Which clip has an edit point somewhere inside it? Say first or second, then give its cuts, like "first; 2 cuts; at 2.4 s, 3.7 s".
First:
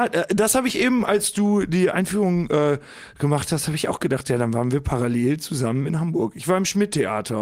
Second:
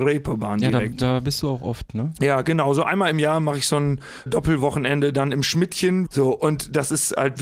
second; 2 cuts; at 4.3 s, 6.1 s